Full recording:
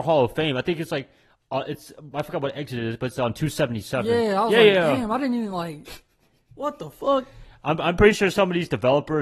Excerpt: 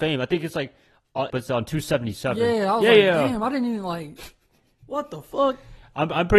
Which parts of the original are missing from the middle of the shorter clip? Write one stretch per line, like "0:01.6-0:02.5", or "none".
0:01.7-0:03.0